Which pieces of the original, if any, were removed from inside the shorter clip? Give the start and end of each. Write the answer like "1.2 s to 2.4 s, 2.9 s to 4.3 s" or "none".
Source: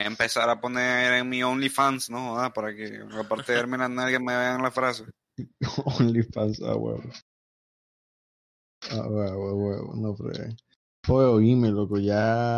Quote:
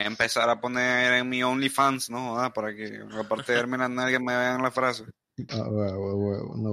5.5 s to 8.9 s